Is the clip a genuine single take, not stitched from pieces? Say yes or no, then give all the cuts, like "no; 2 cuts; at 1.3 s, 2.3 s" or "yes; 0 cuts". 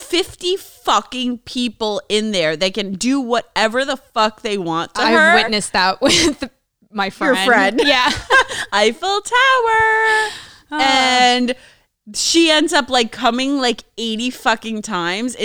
yes; 0 cuts